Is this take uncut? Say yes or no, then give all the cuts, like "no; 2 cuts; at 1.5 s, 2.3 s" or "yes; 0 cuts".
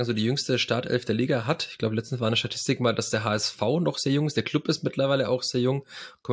yes; 0 cuts